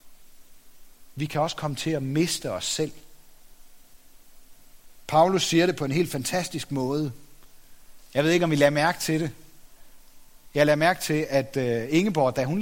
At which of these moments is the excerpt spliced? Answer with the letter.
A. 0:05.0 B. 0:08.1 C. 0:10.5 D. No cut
D